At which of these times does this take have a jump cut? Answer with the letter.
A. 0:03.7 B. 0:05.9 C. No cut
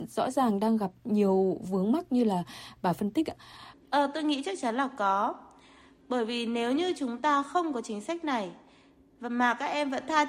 A